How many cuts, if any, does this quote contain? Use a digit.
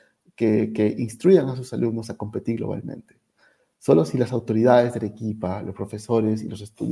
0